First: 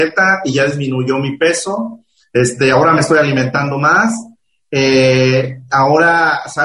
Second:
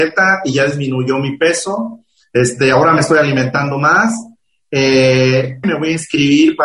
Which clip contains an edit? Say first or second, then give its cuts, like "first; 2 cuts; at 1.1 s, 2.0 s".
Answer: second; 1 cut; at 5.6 s